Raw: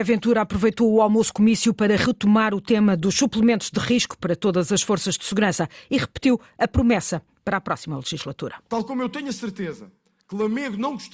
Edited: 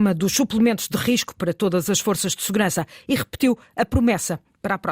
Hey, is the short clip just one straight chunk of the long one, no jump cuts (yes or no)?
yes